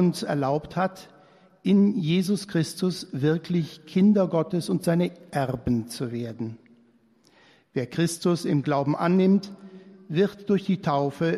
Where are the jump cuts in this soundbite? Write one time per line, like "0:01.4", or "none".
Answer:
none